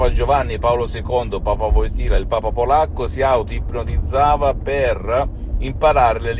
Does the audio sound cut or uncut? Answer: uncut